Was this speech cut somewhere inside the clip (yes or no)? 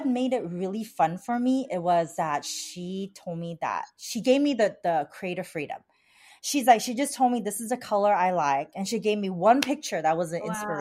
yes